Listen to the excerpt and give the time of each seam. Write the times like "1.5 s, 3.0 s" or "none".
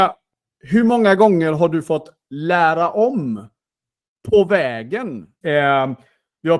5.4 s